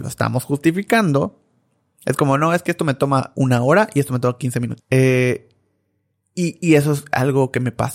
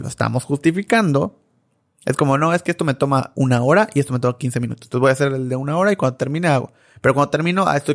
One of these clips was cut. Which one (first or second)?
first